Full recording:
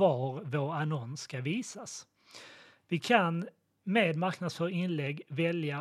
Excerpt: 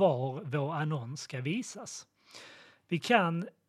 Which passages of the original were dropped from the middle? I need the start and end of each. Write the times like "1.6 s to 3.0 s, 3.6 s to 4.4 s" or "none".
none